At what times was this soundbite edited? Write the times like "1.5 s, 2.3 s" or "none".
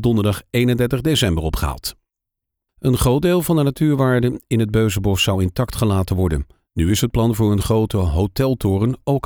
2.7 s